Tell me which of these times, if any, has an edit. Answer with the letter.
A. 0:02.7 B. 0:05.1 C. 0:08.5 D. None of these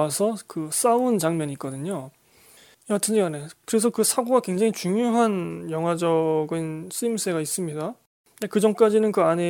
A